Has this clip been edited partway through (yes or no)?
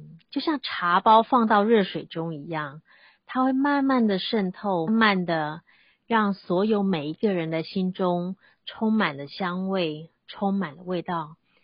yes